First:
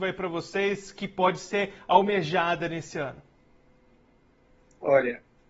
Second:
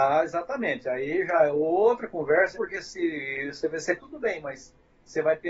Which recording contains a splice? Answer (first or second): second